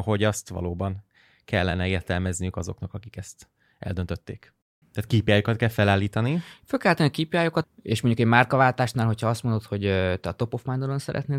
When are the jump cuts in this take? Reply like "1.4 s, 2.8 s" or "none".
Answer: 4.8 s, 7.6 s